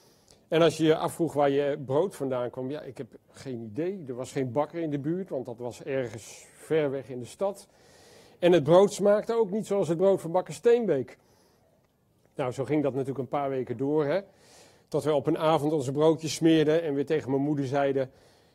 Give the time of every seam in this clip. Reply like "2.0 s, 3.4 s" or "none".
12.2 s